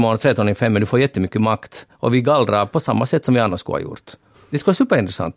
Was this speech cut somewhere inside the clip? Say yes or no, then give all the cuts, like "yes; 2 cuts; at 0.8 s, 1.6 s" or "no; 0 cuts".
yes; 1 cut; at 4.3 s